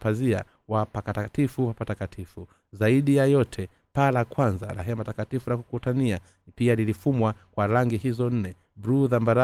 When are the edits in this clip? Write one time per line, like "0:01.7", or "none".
none